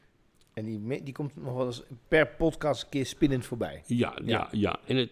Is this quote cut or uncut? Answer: uncut